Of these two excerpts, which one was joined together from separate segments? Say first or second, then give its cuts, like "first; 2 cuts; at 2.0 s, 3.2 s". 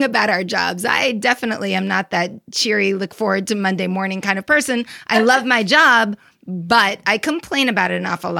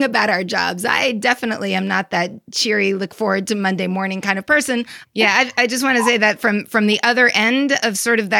second; 1 cut; at 5.0 s